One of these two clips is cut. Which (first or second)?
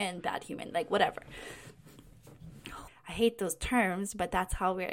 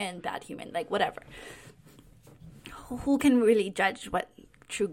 first